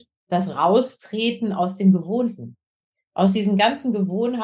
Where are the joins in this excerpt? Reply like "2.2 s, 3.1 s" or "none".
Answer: none